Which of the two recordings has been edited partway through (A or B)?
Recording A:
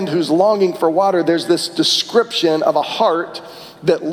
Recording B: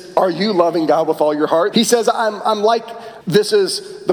B